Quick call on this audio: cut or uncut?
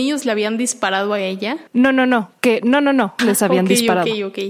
cut